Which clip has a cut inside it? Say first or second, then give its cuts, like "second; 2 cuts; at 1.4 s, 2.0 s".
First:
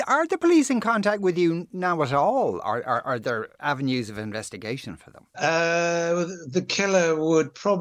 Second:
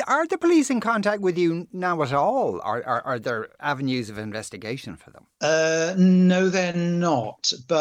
first; 1 cut; at 5.3 s